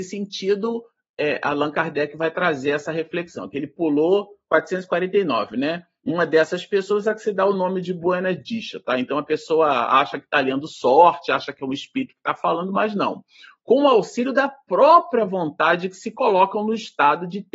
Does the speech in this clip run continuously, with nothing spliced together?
yes; 0 cuts

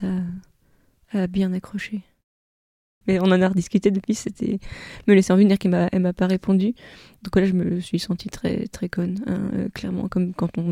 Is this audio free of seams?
no; 1 cut; at 3.0 s

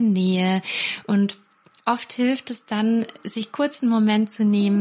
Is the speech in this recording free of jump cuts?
yes; 0 cuts

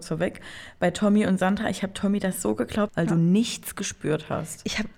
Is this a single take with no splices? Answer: no; 1 cut; at 2.9 s

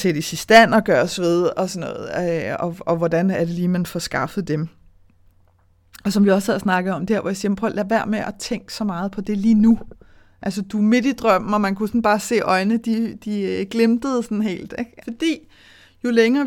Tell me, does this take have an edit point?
yes; 1 cut; at 15.0 s

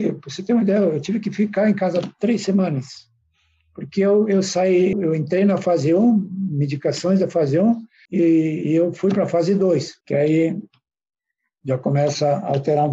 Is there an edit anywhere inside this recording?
yes; 3 cuts; at 4.9 s, 8.1 s, 10.0 s

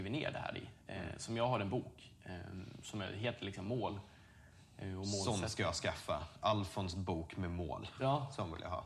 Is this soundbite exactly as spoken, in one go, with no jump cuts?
yes; 0 cuts

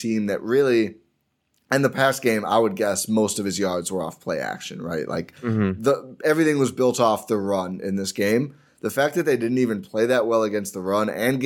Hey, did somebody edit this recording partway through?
no; 0 cuts

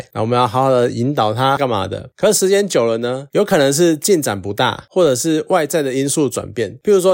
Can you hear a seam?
yes; 1 cut; at 1.6 s

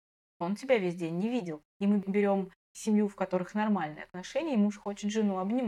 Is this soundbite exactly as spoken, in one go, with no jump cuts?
no; 1 cut; at 1.7 s

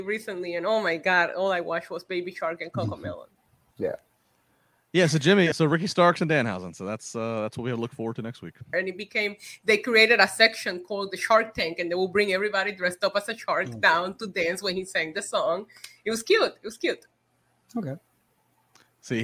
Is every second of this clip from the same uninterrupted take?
no; 2 cuts; at 5.5 s, 8.7 s

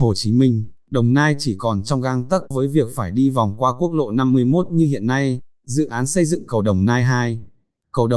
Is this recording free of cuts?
no; 1 cut; at 2.5 s

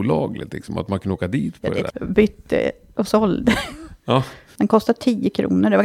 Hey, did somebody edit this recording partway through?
yes; 2 cuts; at 1.9 s, 4.6 s

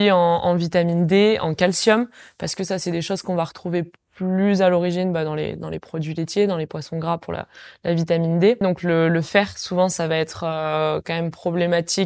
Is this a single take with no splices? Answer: no; 1 cut; at 8.6 s

